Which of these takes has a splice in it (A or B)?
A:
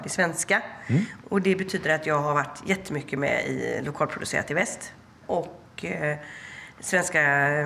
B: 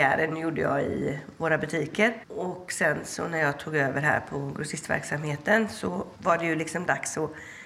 A